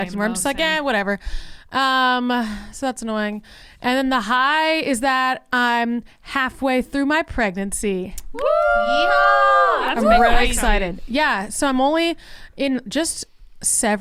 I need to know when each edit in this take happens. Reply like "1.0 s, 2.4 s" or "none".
none